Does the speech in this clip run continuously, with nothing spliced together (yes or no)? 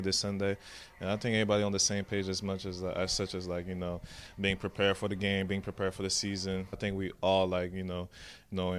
no